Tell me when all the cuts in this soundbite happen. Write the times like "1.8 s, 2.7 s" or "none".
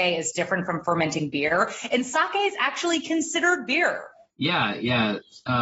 none

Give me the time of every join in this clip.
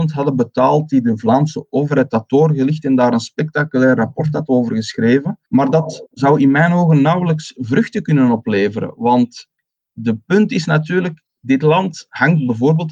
5.4 s

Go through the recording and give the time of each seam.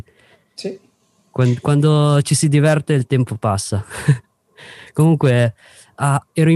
none

